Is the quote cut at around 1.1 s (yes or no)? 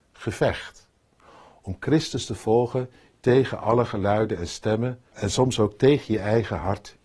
no